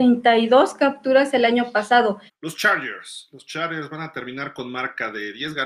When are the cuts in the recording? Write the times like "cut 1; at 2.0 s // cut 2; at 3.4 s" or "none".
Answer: cut 1; at 2.3 s